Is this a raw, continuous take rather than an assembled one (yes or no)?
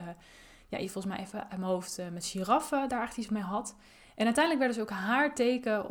yes